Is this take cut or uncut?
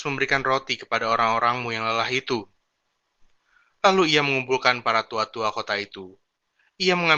uncut